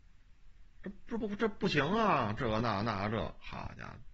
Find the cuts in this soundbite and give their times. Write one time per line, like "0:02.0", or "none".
0:01.2